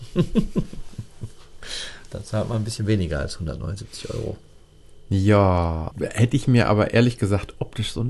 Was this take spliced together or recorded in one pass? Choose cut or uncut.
cut